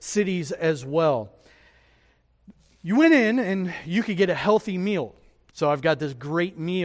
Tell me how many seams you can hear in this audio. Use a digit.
1